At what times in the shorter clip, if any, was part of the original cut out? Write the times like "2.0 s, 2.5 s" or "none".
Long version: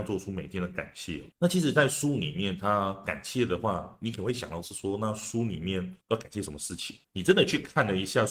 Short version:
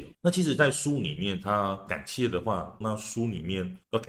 2.8 s